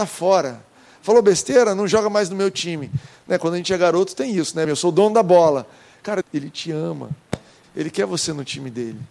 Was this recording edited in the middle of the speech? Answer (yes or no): yes